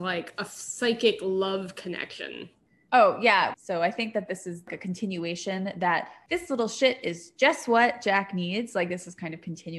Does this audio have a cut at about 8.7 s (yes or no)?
no